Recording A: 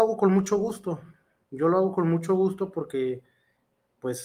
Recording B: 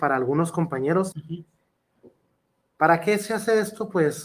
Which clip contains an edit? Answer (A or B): B